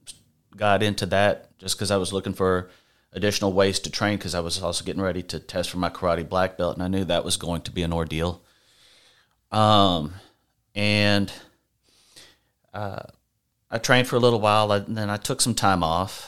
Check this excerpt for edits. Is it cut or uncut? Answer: cut